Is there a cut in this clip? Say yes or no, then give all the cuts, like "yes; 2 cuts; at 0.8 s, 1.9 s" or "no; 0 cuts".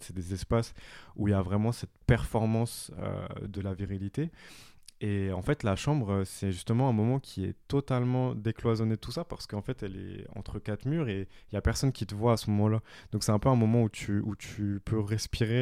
yes; 1 cut; at 3.5 s